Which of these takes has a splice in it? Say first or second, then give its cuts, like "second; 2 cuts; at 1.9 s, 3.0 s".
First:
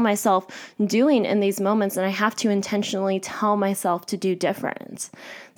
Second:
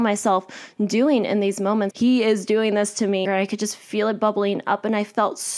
second; 2 cuts; at 1.9 s, 3.2 s